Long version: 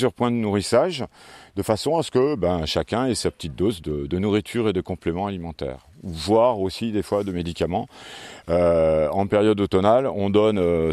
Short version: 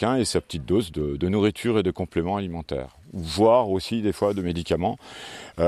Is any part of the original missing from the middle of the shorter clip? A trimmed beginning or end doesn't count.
no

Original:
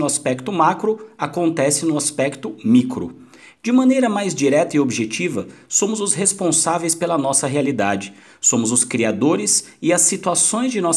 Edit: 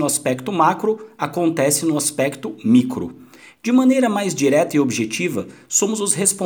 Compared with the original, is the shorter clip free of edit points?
yes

